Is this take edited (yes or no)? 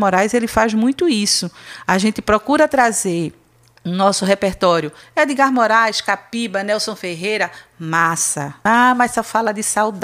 yes